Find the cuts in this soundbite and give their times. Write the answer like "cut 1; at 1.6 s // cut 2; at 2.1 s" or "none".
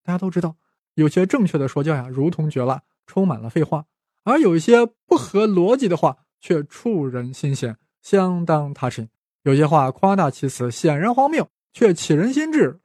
none